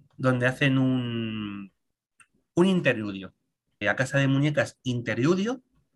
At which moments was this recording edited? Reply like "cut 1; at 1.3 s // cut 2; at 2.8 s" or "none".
cut 1; at 3.8 s